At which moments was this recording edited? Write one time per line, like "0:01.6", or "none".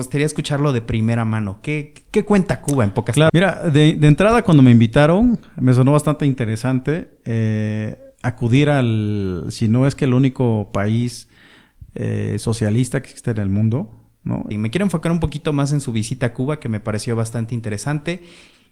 0:03.3
0:14.5